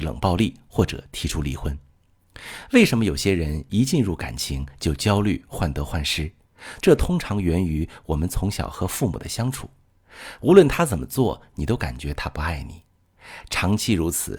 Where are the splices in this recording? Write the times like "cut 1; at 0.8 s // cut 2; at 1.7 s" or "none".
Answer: cut 1; at 6.8 s // cut 2; at 10.4 s